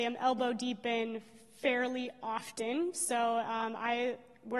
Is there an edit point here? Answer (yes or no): no